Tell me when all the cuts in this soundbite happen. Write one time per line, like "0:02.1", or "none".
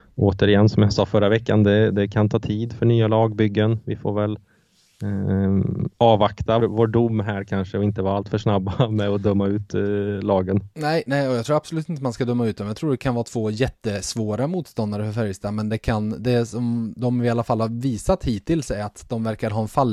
0:06.6